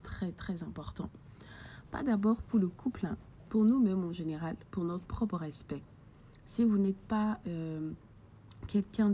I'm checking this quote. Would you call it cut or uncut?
uncut